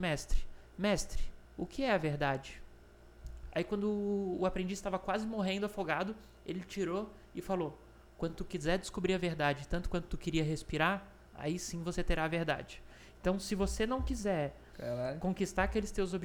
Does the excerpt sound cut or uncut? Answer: cut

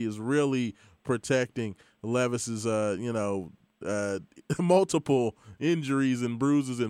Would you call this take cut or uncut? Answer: uncut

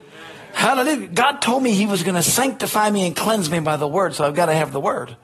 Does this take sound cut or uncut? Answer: uncut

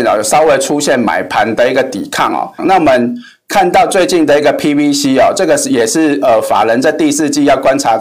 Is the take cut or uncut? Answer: cut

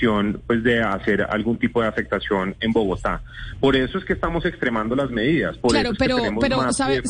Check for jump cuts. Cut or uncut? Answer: uncut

